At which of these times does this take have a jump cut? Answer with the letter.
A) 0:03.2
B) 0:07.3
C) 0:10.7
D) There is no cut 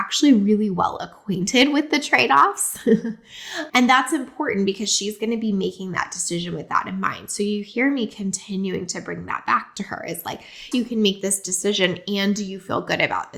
C